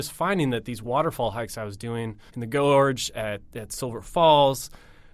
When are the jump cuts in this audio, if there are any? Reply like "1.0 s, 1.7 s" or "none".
2.3 s